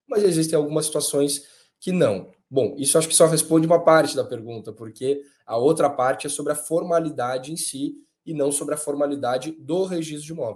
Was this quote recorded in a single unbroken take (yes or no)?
yes